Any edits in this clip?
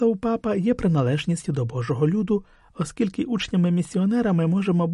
no; 0 cuts

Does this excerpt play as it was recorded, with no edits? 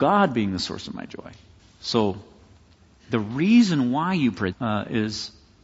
no; 2 cuts; at 1.6 s, 4.5 s

